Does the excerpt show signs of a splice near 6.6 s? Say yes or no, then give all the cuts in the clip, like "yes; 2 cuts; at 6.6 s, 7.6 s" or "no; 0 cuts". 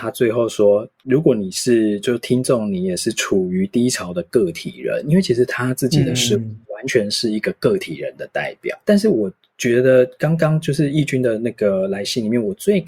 yes; 1 cut; at 6.6 s